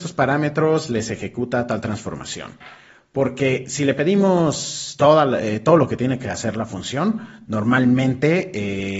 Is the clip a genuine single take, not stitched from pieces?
yes; 0 cuts

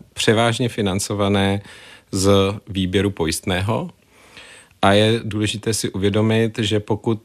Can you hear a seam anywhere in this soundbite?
no; 0 cuts

